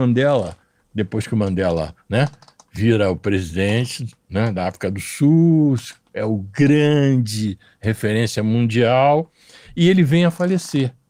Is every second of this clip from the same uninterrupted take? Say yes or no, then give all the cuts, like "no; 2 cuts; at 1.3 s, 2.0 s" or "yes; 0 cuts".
yes; 0 cuts